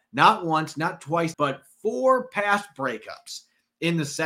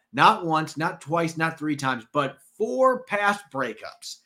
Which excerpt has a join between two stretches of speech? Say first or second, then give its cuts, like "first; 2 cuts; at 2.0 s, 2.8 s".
first; 1 cut; at 1.3 s